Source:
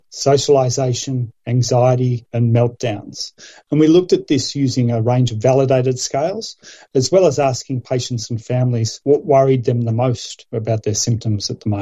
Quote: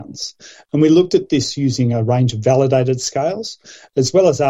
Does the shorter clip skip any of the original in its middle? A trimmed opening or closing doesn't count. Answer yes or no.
no